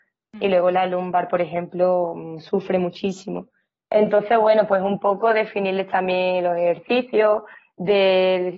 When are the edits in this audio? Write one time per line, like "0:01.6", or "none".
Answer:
none